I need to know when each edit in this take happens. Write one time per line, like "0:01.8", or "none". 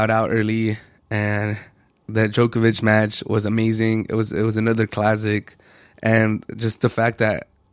none